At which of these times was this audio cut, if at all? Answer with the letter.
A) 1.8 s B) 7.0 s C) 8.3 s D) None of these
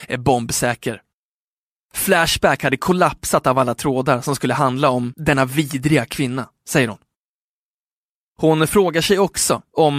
A